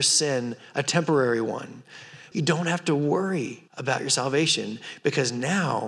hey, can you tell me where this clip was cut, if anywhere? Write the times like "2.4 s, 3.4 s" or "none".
2.3 s, 3.7 s